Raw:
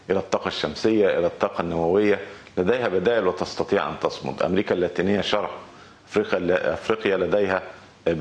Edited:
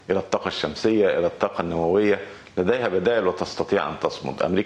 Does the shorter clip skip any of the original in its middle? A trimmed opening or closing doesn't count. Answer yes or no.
no